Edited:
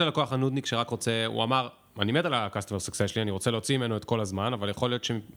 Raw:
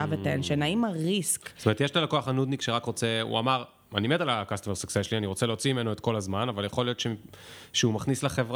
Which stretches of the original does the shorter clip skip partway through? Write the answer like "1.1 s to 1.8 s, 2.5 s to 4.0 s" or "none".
none